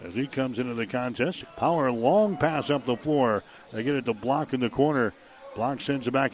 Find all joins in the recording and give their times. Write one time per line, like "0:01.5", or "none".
0:01.4